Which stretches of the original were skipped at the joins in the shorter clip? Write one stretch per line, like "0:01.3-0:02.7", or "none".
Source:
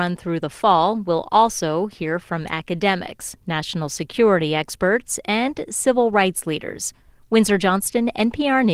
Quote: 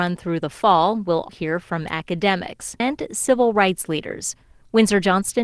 0:01.3-0:01.9
0:03.4-0:05.4